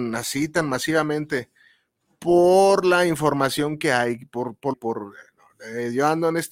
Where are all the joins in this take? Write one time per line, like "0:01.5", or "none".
0:04.7